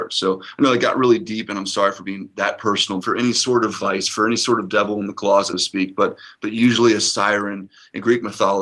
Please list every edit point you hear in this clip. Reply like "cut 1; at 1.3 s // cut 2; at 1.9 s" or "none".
cut 1; at 3.0 s // cut 2; at 5.5 s

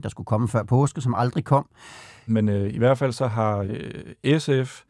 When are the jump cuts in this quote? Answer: cut 1; at 2.3 s

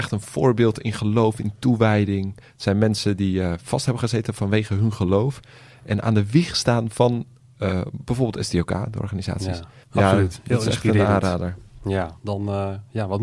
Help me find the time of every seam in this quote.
cut 1; at 9.8 s // cut 2; at 12.2 s

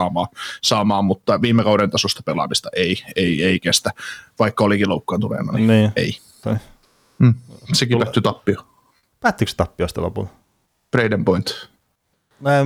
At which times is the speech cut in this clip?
cut 1; at 6.4 s

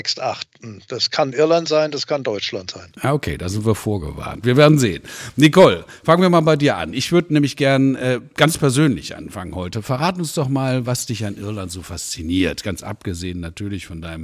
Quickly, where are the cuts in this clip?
none

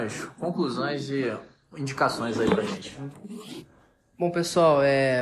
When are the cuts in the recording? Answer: none

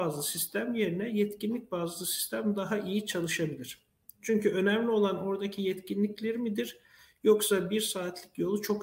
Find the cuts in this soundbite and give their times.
none

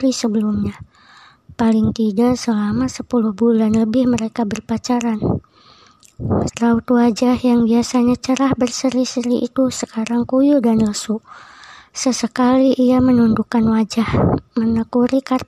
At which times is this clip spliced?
cut 1; at 6.5 s

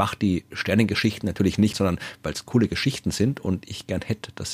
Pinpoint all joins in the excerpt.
cut 1; at 1.7 s

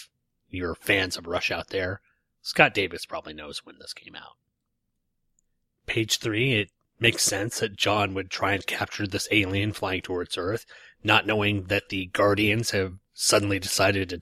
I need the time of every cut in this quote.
none

